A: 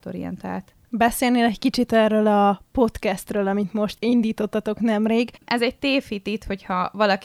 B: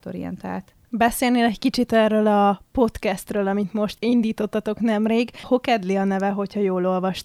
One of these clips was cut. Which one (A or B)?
A